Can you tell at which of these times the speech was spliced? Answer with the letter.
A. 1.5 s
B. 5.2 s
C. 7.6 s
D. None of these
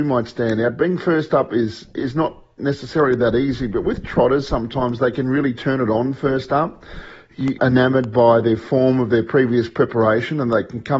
C